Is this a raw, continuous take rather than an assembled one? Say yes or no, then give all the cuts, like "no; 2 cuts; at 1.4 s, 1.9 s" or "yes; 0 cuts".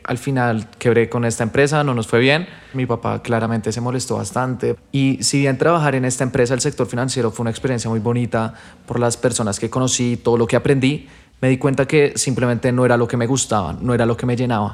no; 2 cuts; at 2.7 s, 4.8 s